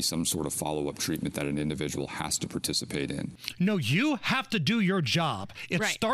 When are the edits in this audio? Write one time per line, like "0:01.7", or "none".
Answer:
none